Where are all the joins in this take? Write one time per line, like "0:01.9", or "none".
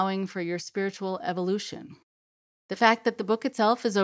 0:02.6